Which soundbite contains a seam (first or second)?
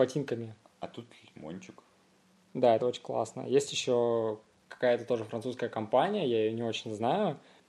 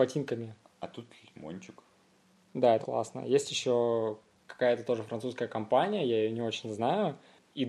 second